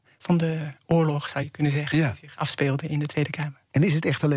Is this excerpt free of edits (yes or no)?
yes